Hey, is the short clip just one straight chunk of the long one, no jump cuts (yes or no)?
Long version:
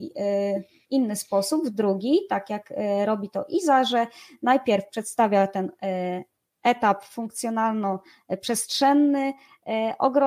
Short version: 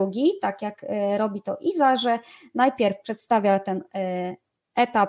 yes